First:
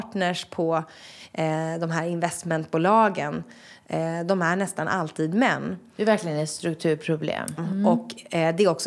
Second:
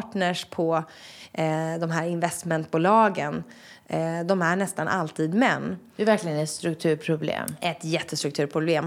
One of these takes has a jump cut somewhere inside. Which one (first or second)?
first